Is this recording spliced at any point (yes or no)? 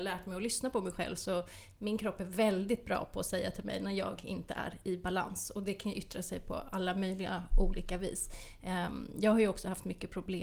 no